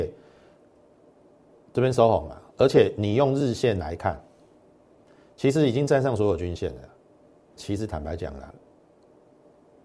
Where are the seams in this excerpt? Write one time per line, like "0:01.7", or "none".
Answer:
0:07.6